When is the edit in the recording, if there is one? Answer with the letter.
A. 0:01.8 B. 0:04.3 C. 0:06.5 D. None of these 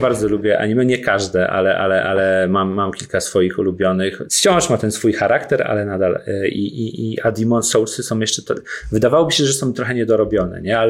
B